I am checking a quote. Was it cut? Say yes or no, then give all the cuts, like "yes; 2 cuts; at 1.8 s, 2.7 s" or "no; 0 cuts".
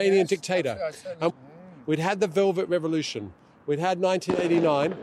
yes; 1 cut; at 1.3 s